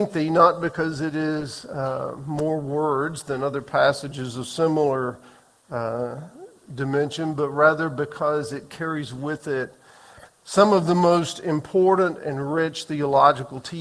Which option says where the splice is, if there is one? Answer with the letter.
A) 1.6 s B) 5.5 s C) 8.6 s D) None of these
D